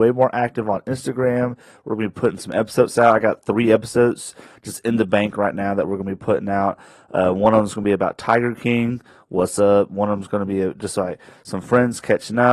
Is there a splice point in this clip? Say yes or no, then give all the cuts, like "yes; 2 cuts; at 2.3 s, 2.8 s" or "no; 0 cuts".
no; 0 cuts